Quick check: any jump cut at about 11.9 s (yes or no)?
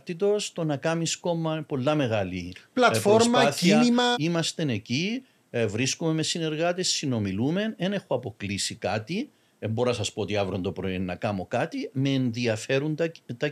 yes